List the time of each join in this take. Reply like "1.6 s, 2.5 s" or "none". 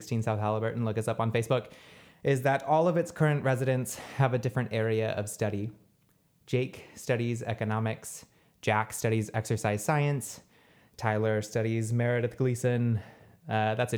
none